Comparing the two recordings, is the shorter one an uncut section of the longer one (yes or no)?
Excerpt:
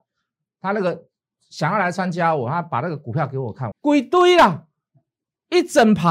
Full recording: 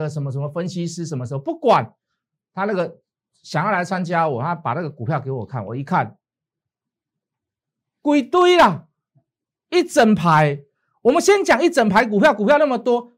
no